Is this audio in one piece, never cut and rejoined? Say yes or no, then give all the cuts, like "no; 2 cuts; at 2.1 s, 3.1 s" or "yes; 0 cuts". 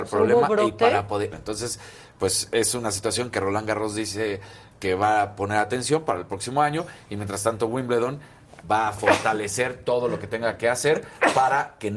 no; 2 cuts; at 1.3 s, 8.6 s